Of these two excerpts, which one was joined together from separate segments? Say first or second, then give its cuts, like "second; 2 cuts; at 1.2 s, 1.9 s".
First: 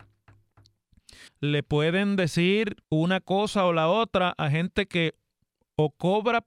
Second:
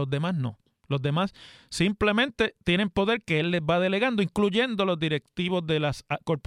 first; 2 cuts; at 1.3 s, 2.8 s